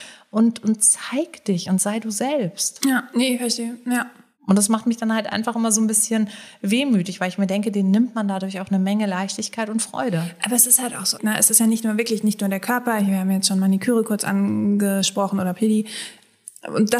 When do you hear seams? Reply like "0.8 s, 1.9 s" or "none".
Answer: 11.2 s